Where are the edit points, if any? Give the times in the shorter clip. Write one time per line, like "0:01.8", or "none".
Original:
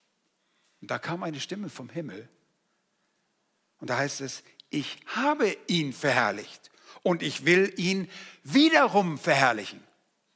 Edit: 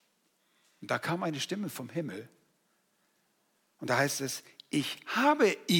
none